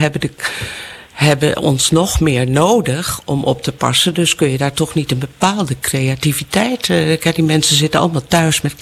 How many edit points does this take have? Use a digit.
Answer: 0